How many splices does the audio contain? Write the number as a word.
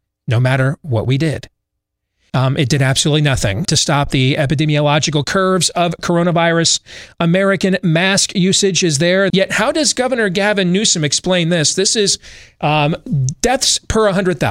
three